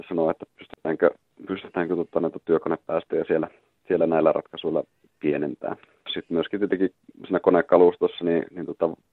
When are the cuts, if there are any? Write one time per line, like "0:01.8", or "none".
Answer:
0:06.1